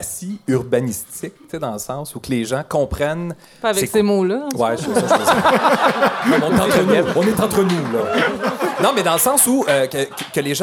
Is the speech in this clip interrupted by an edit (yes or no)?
no